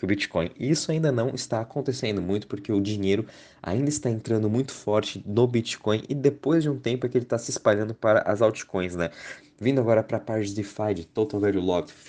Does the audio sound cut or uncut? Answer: cut